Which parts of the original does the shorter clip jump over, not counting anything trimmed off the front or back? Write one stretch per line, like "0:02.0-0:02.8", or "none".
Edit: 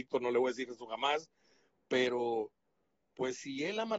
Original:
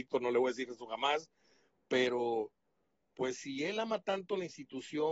none